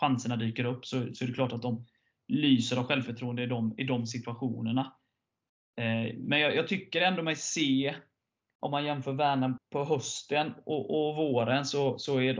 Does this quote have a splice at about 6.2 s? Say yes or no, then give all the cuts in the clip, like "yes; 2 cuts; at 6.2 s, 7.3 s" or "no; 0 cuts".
no; 1 cut; at 9.6 s